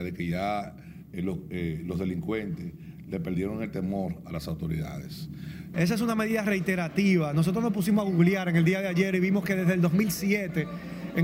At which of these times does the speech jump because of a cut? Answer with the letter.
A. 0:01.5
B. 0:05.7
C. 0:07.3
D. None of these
B